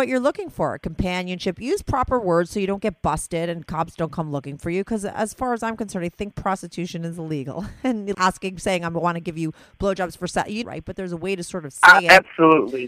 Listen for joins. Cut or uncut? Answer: cut